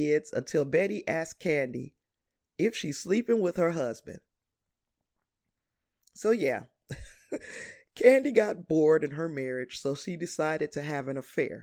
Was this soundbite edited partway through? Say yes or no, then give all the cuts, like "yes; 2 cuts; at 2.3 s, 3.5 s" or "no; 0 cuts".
no; 0 cuts